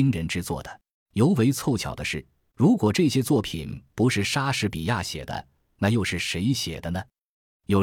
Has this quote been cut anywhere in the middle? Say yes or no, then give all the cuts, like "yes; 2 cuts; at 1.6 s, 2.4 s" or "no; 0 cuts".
yes; 2 cuts; at 0.9 s, 2.5 s